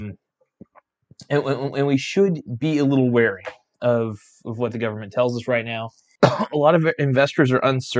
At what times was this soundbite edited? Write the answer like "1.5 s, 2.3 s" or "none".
6.2 s